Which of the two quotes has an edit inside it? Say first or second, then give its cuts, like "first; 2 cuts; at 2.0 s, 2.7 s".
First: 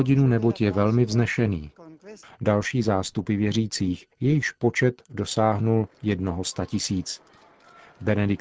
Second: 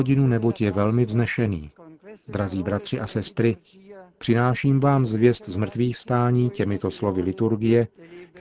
first; 2 cuts; at 2.2 s, 4.1 s